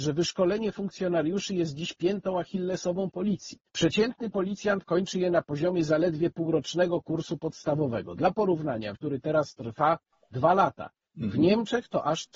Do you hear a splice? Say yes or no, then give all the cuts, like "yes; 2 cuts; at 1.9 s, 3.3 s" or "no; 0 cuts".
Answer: yes; 2 cuts; at 3.7 s, 8.9 s